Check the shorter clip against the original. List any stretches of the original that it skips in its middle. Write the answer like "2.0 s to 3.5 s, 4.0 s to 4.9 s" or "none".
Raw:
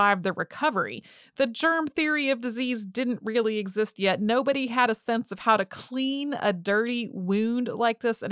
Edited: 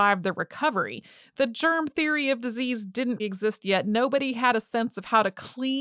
3.2 s to 3.5 s